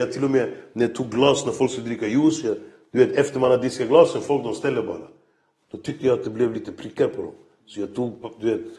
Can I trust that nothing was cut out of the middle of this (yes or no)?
yes